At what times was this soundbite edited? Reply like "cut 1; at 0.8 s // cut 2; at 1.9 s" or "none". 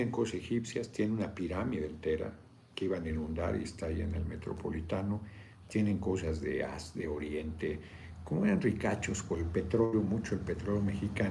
none